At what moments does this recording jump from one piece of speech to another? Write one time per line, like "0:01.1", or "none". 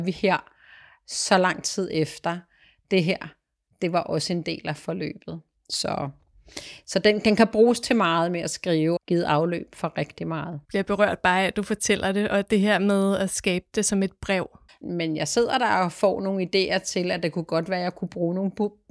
0:09.0
0:10.6
0:14.7